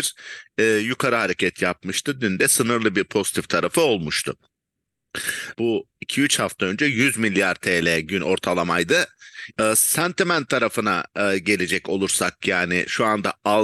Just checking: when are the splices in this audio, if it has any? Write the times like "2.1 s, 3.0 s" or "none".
5.5 s, 9.5 s